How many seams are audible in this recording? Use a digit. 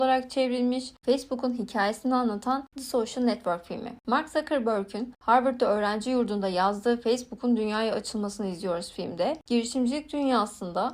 0